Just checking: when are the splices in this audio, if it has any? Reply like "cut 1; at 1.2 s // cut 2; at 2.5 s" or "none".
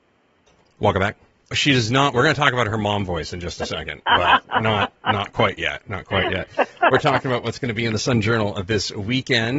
cut 1; at 1.5 s